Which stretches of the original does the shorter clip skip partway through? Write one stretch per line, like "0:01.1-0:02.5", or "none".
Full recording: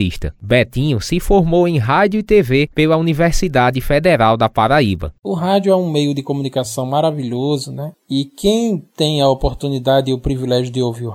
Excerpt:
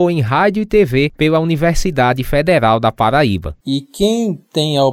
0:05.2-0:08.0